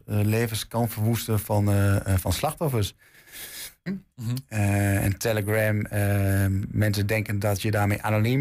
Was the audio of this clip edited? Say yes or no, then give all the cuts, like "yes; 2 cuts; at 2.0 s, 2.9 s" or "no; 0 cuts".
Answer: yes; 2 cuts; at 3.9 s, 6.6 s